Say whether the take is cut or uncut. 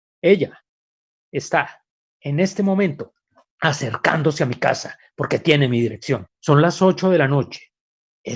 cut